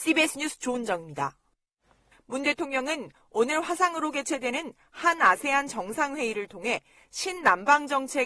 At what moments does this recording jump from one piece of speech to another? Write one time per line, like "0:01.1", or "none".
0:02.1